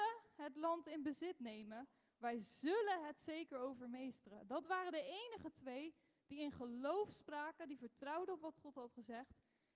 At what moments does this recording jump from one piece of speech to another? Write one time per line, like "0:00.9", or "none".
none